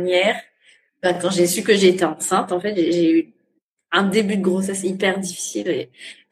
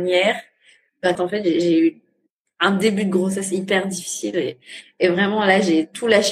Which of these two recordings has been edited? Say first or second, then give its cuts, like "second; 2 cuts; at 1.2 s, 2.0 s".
second; 1 cut; at 1.2 s